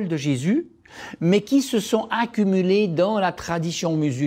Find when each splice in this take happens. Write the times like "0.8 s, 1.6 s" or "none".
none